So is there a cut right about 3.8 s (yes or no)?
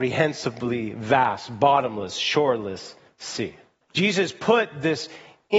yes